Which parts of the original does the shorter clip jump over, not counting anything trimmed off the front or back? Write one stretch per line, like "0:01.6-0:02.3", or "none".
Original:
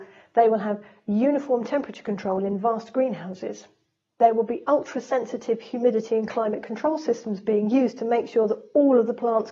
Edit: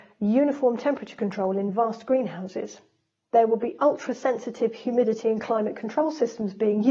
none

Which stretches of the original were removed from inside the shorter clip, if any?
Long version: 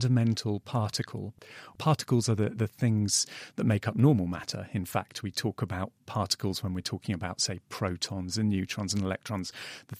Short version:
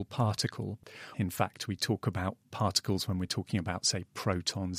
0:01.7-0:04.7

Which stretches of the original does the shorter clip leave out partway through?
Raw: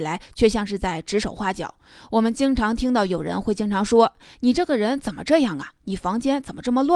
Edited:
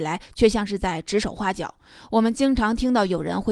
none

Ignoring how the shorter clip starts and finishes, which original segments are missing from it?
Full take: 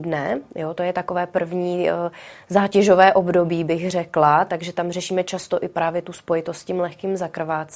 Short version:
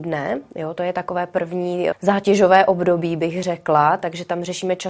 0:01.9-0:02.4

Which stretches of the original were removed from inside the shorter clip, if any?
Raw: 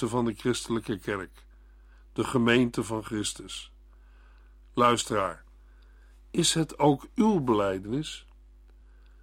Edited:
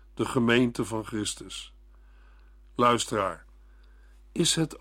none

